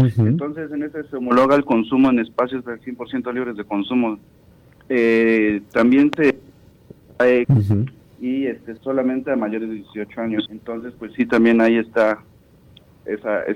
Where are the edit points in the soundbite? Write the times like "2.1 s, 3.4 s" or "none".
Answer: 7.4 s, 8.8 s, 10.5 s

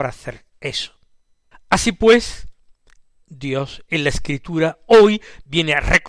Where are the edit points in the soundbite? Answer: 1.5 s

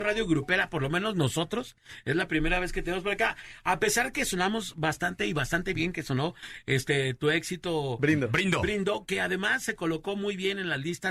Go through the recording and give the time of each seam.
none

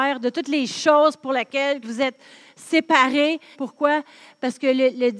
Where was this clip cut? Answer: 1.8 s, 3.5 s

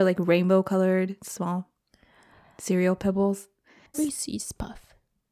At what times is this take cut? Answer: 3.9 s

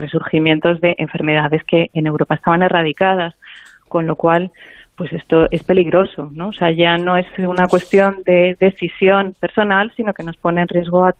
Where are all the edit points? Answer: none

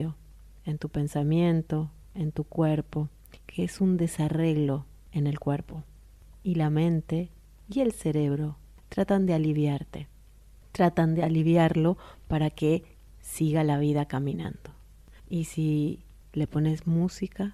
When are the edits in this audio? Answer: 3.4 s, 15.2 s

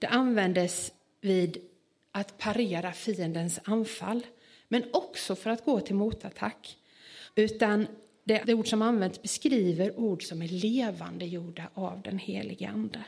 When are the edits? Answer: 7.3 s, 8.4 s

